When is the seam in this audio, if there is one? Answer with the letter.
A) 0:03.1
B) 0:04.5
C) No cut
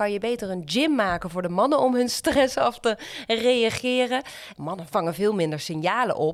B